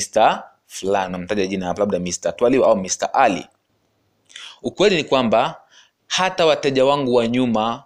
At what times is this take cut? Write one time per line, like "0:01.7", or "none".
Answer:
none